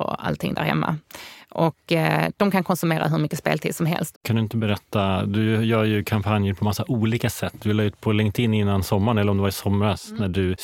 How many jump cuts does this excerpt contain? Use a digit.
1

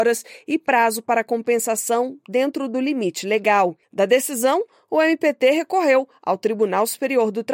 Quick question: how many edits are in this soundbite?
0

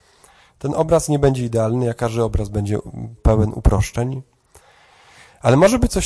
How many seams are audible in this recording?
1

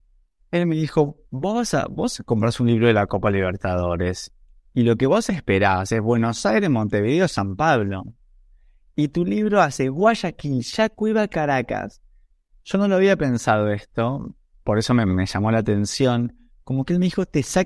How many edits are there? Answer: 0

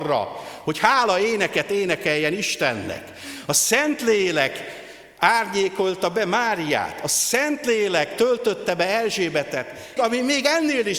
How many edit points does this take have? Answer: 1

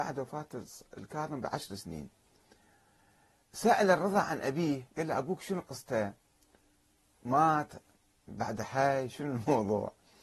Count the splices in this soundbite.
0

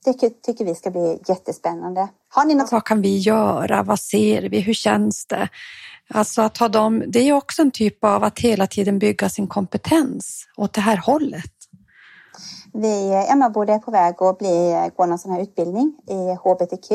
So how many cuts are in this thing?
1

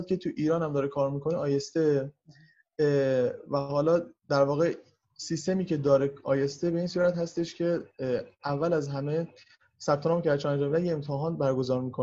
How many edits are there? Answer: 1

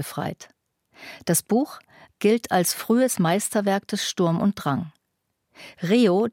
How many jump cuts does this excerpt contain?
1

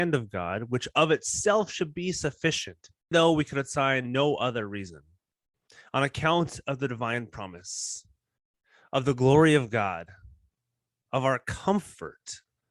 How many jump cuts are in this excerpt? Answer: 1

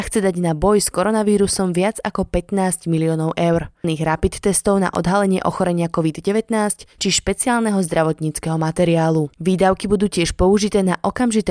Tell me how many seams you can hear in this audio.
2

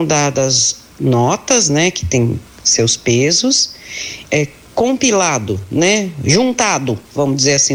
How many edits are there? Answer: 1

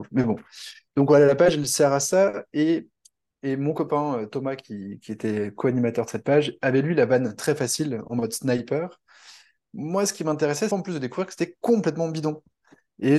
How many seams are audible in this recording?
1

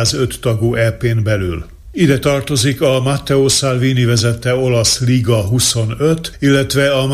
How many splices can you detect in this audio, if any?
0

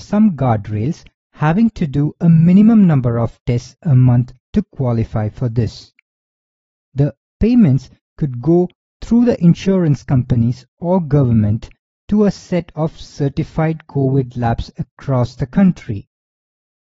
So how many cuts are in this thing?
1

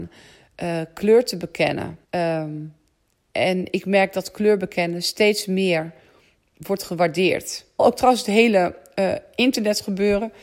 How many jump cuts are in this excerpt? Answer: 2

